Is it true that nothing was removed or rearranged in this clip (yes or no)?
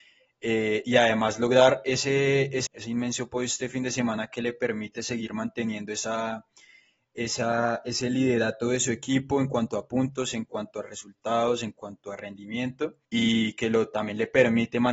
no